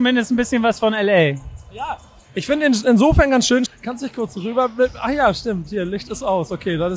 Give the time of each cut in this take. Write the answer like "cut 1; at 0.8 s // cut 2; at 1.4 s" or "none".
cut 1; at 3.7 s